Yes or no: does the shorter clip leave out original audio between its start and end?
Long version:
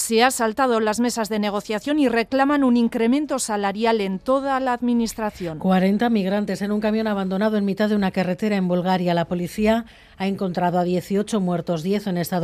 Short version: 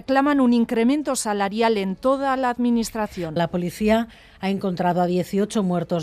yes